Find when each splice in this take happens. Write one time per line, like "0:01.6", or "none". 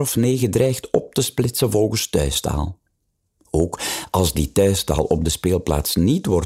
none